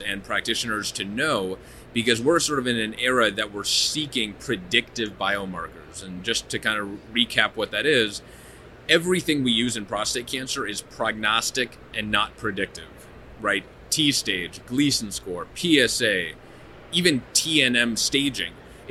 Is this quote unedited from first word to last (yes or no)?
yes